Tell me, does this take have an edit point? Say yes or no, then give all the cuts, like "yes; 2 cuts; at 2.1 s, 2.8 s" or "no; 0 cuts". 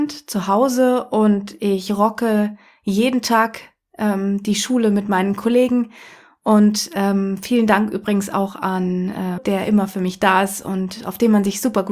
yes; 1 cut; at 9.4 s